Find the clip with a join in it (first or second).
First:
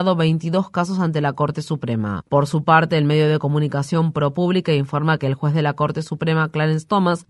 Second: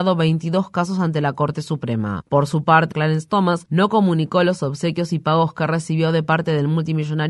second